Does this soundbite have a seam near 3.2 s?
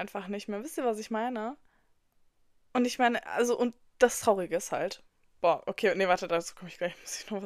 no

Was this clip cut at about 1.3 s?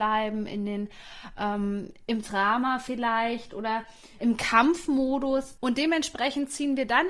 no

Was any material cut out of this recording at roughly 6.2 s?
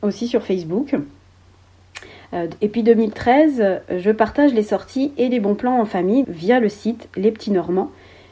yes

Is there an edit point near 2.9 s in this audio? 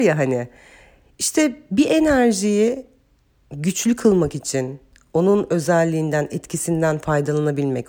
no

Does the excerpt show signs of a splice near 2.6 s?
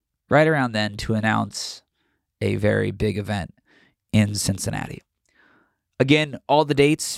yes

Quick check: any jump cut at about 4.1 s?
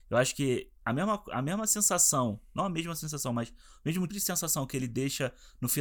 yes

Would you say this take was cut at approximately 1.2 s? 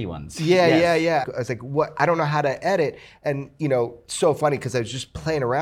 yes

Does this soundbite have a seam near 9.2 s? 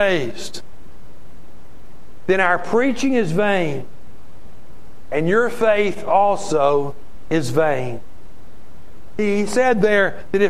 yes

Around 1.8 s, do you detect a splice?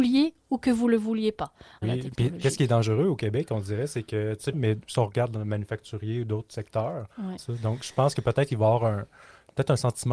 yes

